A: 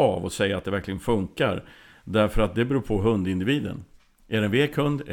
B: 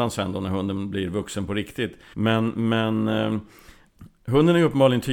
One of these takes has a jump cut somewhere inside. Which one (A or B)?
B